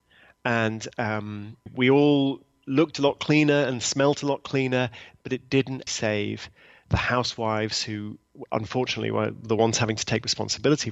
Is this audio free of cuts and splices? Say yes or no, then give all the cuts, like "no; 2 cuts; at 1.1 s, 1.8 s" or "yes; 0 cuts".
no; 2 cuts; at 1.7 s, 5.9 s